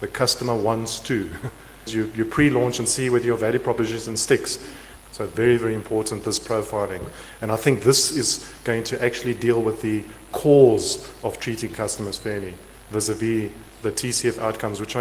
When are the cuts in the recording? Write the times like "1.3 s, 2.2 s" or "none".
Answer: 1.9 s, 5.0 s